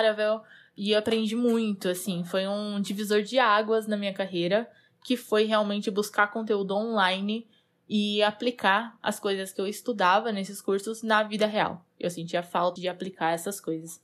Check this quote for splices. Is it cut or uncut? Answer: cut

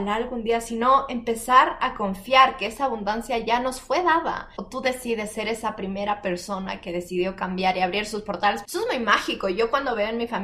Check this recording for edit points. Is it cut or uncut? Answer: cut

